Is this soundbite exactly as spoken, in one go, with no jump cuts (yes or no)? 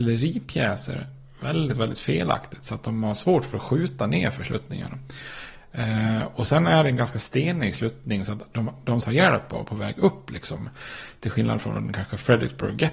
no